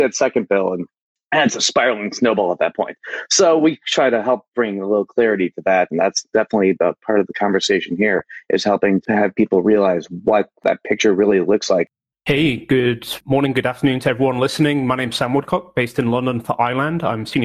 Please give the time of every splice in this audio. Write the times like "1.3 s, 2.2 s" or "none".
none